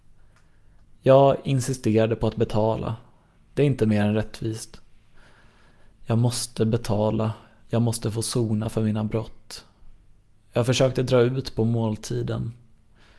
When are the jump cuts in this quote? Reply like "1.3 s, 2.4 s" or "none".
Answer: none